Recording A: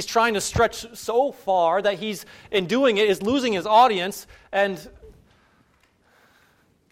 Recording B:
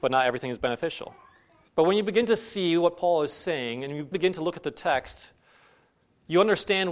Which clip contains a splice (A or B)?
B